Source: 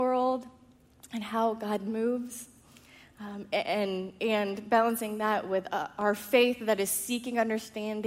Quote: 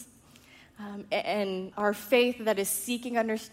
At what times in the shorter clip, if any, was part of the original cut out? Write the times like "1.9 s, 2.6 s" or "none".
1.7 s